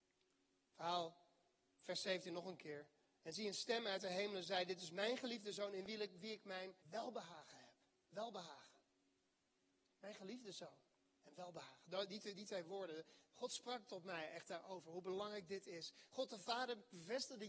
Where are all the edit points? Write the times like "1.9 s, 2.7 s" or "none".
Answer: 6.8 s